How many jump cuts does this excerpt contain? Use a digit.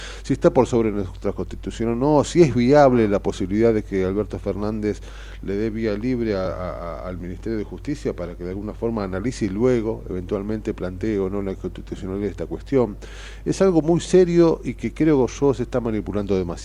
0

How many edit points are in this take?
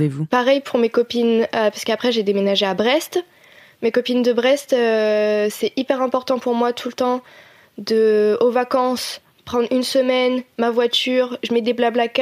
0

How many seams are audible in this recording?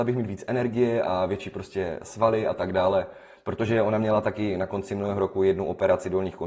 0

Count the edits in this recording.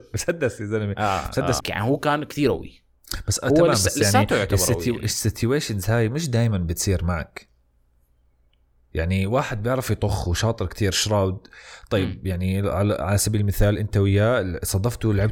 1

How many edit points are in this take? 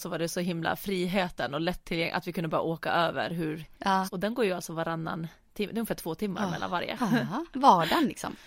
2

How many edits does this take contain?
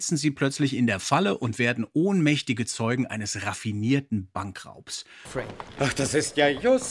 1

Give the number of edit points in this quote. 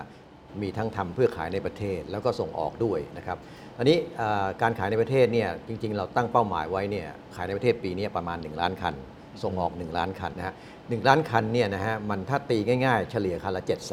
1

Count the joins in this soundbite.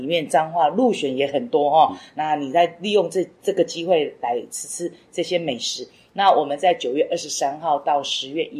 0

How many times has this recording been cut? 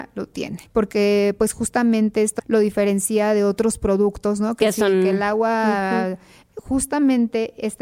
2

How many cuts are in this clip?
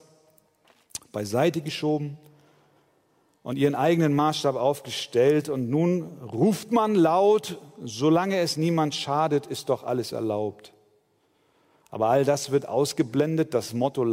1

